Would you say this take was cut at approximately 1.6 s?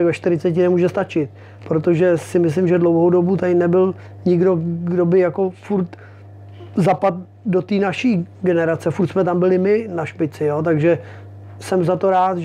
yes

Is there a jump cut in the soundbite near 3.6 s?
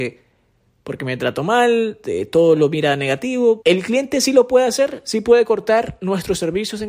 yes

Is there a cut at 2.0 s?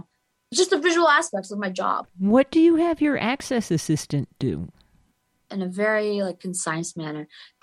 yes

